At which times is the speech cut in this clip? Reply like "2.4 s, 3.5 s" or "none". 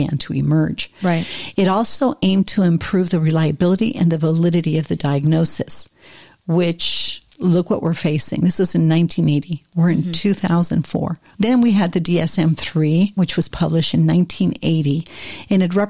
11.3 s, 13.2 s